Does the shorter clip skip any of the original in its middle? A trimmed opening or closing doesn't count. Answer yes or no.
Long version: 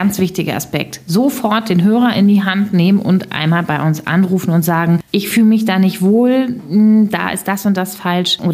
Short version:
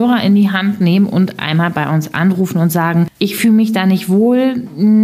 no